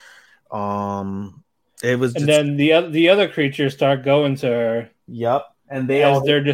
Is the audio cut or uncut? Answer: cut